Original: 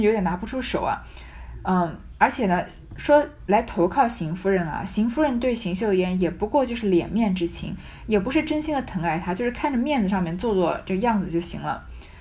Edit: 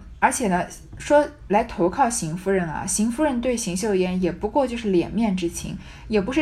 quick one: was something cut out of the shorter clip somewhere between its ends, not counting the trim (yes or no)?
no